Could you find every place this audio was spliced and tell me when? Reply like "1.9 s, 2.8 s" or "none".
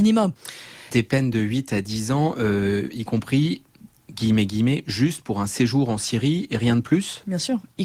none